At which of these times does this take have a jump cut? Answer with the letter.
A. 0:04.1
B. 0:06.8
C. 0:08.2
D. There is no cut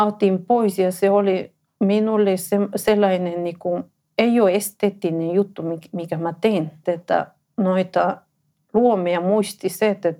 B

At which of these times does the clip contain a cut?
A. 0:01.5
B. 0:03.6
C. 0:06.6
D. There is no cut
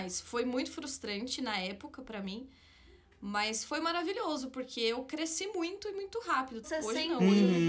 C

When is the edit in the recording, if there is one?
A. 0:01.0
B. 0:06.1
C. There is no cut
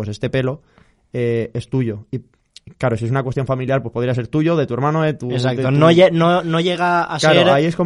C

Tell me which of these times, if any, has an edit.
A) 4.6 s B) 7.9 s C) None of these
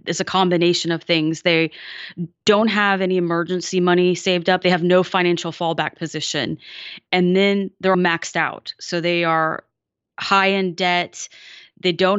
B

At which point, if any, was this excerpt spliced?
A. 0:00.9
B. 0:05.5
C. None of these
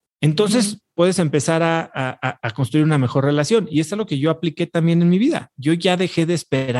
C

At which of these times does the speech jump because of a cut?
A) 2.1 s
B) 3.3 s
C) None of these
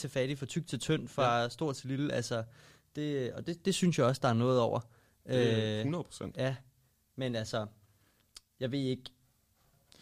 C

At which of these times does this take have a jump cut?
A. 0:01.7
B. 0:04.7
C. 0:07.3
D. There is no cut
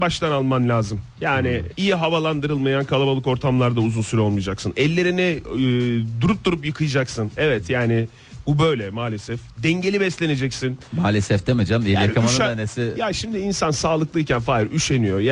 A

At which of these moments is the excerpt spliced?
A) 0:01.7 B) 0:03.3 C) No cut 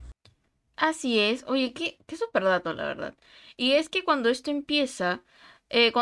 C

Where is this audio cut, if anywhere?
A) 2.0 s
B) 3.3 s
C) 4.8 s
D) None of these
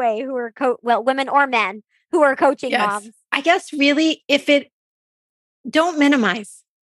B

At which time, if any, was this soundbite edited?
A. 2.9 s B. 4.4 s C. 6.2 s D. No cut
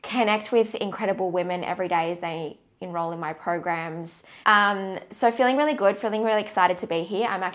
B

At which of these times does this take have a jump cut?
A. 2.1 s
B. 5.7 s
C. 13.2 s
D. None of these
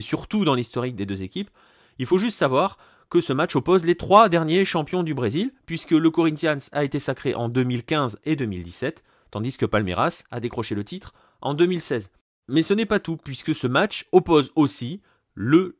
D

